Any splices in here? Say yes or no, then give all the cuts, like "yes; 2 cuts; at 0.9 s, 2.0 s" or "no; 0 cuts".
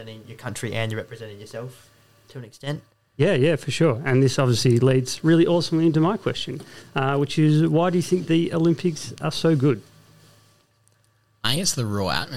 no; 0 cuts